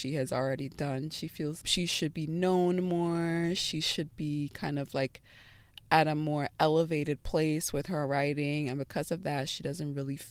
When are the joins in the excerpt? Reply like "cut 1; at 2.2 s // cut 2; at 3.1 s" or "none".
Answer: cut 1; at 1.6 s